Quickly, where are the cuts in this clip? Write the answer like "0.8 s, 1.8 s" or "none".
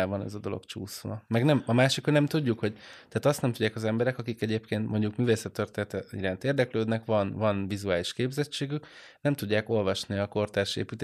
none